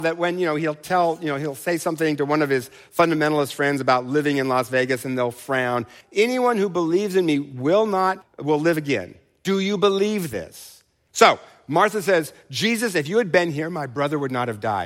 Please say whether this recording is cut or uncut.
cut